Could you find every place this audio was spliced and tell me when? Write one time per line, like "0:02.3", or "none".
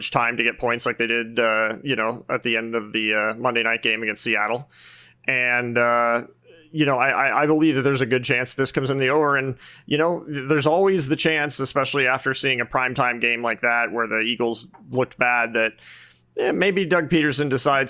none